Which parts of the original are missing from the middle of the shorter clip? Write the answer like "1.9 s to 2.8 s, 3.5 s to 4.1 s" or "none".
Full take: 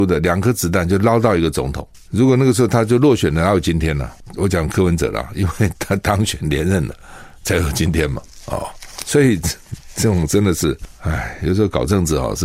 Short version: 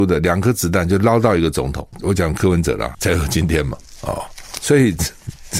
1.9 s to 4.3 s, 5.3 s to 7.4 s